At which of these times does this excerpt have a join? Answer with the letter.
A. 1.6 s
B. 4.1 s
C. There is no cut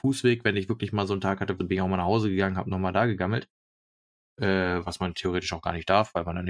A